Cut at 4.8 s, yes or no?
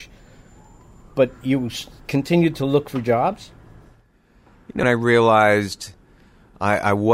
yes